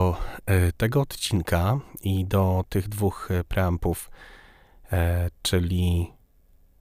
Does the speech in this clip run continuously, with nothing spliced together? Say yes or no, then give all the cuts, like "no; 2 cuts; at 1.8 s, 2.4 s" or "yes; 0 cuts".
yes; 0 cuts